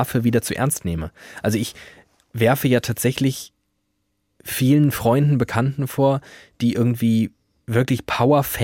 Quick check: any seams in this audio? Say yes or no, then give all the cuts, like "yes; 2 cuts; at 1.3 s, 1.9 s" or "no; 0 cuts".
no; 0 cuts